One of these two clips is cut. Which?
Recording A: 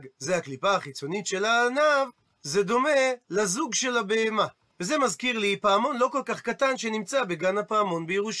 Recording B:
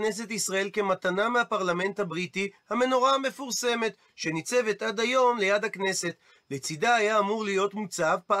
A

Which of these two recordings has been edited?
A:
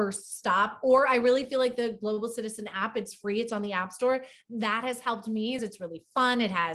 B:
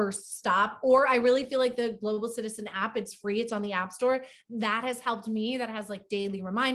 A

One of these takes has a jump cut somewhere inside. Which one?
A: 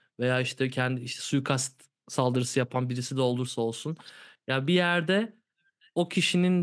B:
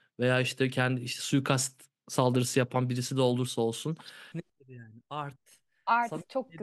B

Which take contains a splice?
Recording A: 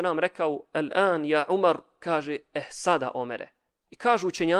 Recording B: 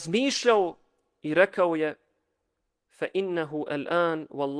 A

